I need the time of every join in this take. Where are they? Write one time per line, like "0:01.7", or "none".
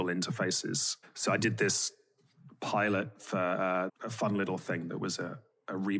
0:03.9